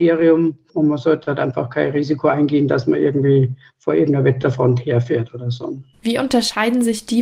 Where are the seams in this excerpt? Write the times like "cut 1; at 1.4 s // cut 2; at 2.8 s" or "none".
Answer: cut 1; at 6.0 s